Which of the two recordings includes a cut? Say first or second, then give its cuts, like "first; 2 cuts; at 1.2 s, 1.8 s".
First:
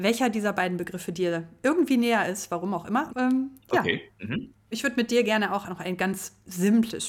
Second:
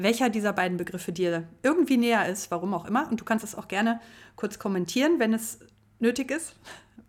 first; 2 cuts; at 3.1 s, 4.7 s